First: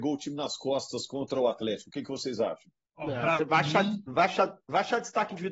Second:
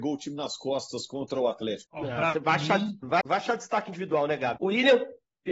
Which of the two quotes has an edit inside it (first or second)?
second